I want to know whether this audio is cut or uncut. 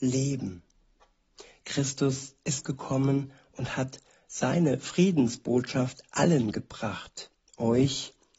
uncut